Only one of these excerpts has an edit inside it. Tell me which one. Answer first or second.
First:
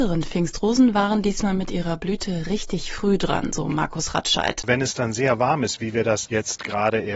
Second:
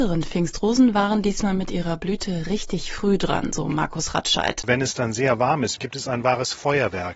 second